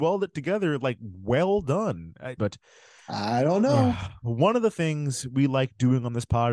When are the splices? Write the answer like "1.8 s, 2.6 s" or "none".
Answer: 2.4 s